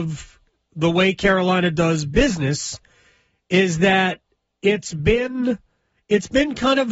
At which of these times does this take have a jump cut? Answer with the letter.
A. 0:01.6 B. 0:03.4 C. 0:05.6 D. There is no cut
D